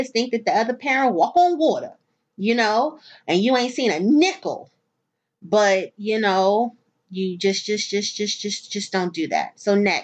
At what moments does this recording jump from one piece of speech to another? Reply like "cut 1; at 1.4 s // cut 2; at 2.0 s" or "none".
none